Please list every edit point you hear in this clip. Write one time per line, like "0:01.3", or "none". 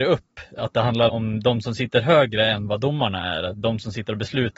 0:01.1